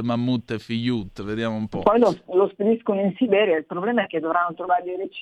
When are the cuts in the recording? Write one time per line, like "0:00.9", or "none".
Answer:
0:02.3